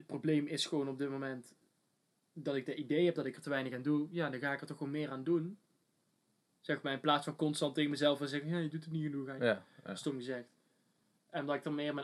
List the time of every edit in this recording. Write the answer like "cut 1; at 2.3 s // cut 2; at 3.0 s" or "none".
cut 1; at 9.4 s